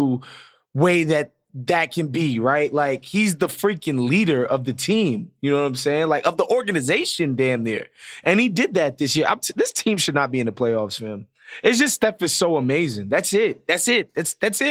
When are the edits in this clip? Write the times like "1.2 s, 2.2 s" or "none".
none